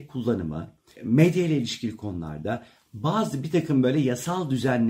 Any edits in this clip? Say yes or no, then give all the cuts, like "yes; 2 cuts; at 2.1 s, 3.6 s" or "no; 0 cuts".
yes; 1 cut; at 1.0 s